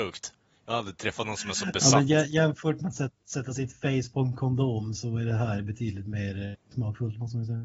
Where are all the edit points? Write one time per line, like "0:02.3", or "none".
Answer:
none